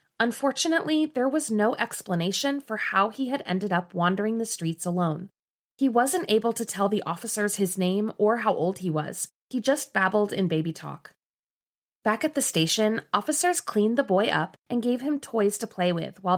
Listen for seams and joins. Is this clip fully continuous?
yes; 0 cuts

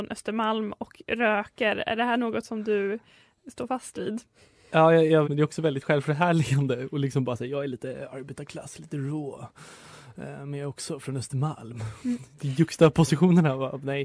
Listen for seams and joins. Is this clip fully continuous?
no; 1 cut; at 5.2 s

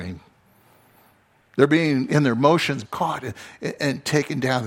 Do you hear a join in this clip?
yes; 1 cut; at 2.8 s

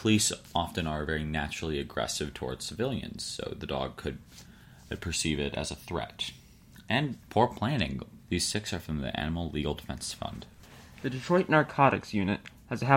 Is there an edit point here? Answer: yes; 1 cut; at 8.2 s

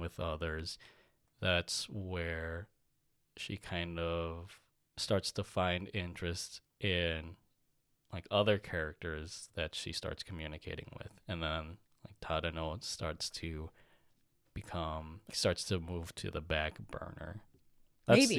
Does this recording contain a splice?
yes; 1 cut; at 15.3 s

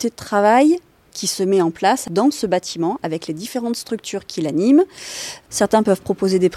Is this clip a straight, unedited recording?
no; 1 cut; at 5.5 s

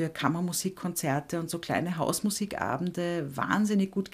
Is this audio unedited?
yes; 0 cuts

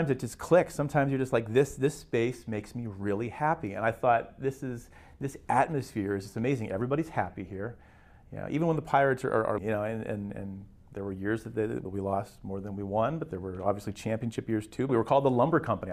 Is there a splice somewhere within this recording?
yes; 3 cuts; at 9.6 s, 11.9 s, 14.9 s

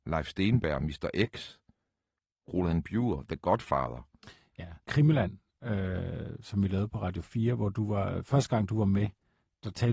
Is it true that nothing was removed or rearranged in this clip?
no; 1 cut; at 4.8 s

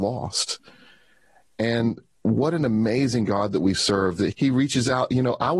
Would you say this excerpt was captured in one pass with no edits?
no; 1 cut; at 4.3 s

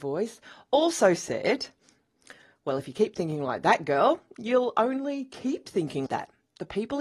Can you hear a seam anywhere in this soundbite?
yes; 1 cut; at 6.1 s

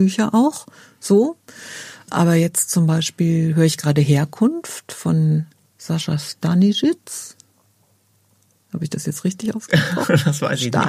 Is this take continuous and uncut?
yes; 0 cuts

